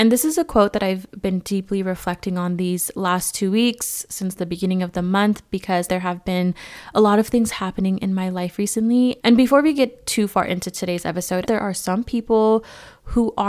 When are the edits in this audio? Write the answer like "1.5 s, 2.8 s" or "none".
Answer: 5.9 s, 9.2 s, 11.4 s